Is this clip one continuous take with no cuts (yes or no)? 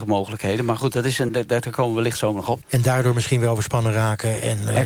no